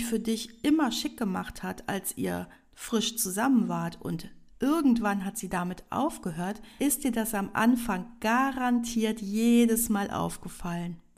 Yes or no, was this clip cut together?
no